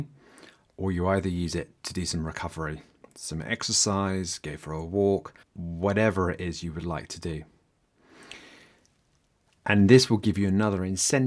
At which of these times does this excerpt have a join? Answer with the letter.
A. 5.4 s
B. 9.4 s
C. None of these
A